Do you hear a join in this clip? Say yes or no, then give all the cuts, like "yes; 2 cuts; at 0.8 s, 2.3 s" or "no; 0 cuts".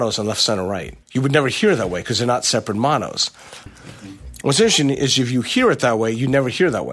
yes; 2 cuts; at 1.0 s, 3.7 s